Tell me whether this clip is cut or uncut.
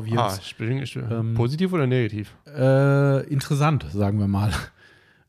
uncut